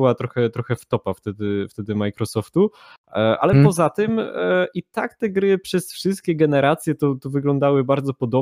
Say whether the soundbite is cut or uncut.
uncut